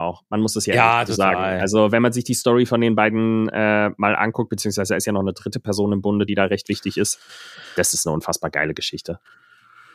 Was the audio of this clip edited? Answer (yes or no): no